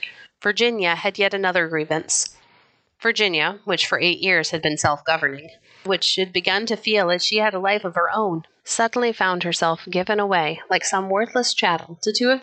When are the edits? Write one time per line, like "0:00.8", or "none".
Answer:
0:05.9
0:08.6